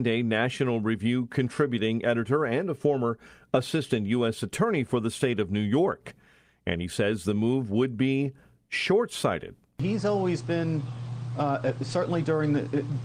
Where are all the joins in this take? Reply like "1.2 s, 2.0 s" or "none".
none